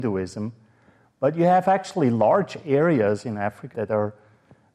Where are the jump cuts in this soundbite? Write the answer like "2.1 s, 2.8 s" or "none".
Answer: 3.7 s

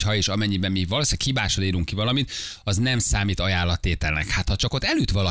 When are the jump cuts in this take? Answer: none

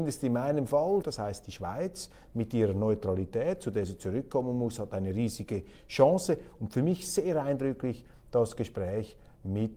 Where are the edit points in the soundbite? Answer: 1.0 s

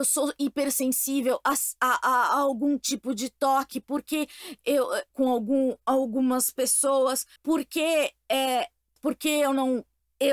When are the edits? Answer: 5.1 s, 7.4 s, 9.0 s

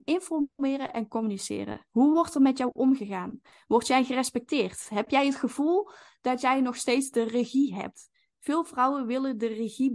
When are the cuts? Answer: none

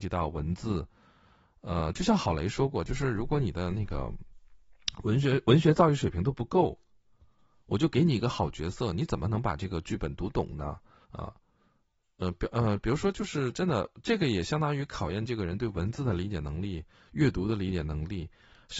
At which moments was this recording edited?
11.0 s

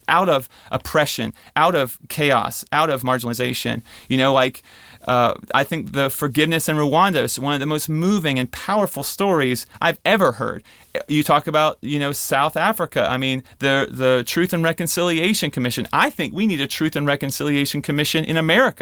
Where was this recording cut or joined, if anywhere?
none

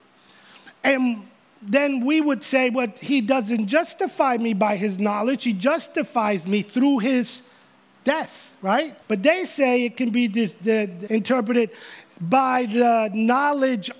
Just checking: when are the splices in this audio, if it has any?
9.0 s, 11.1 s

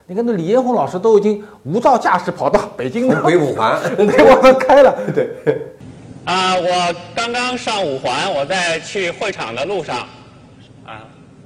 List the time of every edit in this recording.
none

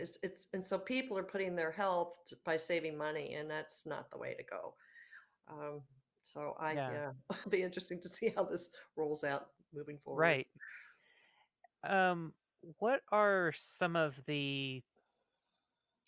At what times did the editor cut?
7.4 s, 11.7 s

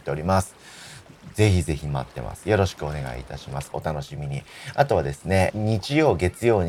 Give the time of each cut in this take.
3.7 s, 5.5 s

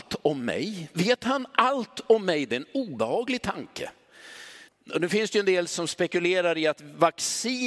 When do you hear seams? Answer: 4.7 s

